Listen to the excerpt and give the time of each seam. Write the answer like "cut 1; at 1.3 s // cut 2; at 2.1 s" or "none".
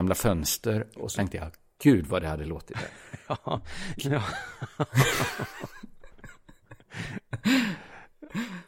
cut 1; at 4.0 s